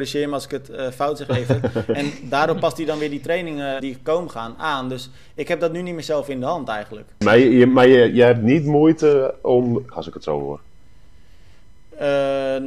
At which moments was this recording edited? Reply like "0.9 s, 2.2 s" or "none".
3.8 s, 7.2 s, 9.9 s